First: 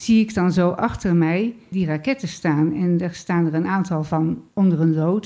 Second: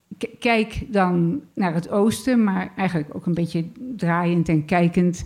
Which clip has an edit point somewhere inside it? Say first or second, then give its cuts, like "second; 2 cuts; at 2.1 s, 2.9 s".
first; 1 cut; at 1.7 s